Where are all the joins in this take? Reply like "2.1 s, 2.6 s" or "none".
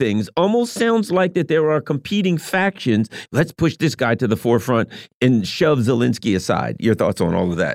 3.3 s